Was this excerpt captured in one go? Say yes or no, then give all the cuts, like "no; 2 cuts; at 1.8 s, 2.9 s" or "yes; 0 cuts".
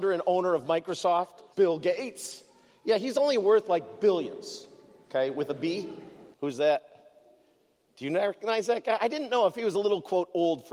no; 2 cuts; at 1.5 s, 6.3 s